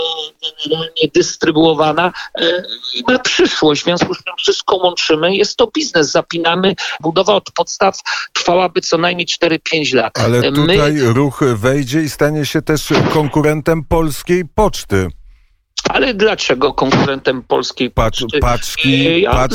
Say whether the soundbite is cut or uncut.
cut